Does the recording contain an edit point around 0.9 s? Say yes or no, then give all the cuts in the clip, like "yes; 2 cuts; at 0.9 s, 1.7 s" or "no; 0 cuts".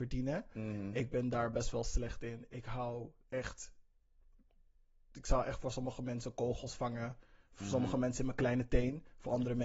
no; 0 cuts